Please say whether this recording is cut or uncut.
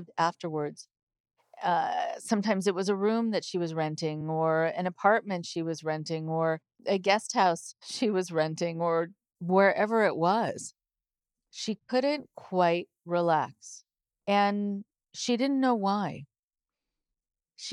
uncut